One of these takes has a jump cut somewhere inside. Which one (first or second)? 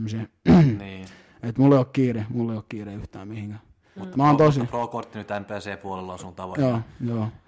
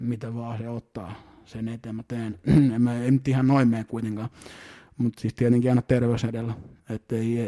first